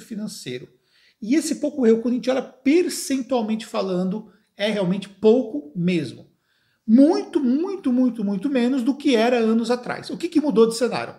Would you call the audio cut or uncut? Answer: uncut